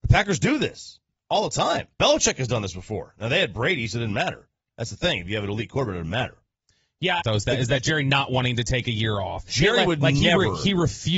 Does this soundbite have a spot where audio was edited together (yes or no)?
yes